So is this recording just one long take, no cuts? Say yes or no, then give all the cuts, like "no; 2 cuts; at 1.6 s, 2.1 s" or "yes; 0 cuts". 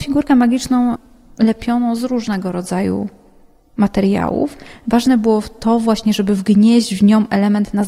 yes; 0 cuts